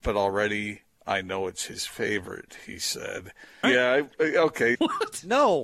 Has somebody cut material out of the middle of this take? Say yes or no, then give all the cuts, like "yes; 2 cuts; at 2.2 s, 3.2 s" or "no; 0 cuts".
yes; 2 cuts; at 3.6 s, 4.7 s